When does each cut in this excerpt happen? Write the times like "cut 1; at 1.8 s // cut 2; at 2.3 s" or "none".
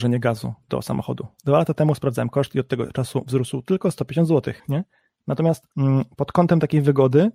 cut 1; at 4.6 s // cut 2; at 5.7 s